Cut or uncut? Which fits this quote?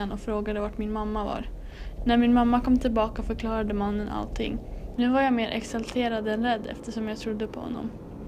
cut